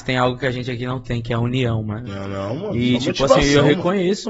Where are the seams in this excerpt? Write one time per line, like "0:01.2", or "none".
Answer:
0:02.1